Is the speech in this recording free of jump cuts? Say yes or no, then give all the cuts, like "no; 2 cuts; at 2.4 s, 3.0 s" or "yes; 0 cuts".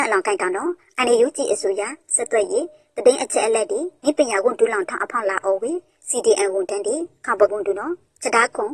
no; 1 cut; at 7.5 s